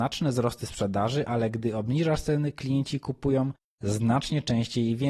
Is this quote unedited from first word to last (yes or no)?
yes